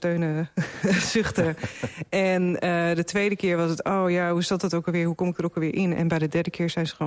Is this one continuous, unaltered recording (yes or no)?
yes